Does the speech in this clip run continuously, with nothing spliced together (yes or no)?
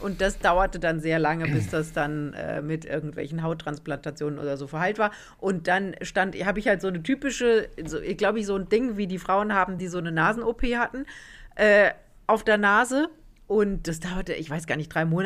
yes